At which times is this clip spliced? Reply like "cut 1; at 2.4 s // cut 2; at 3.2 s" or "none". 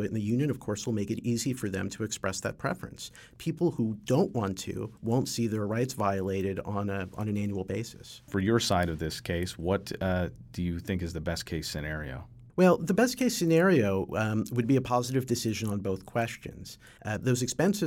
cut 1; at 17.0 s